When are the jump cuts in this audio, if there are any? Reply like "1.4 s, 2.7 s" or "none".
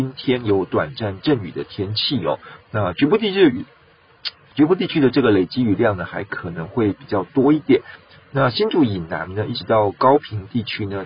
none